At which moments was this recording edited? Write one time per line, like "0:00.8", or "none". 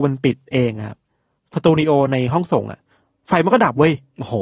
none